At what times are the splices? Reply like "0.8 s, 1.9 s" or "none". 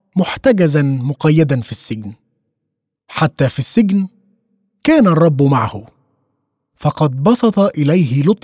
3.0 s